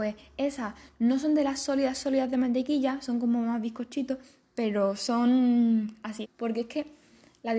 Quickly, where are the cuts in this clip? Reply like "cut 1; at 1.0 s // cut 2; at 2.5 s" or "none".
cut 1; at 6.2 s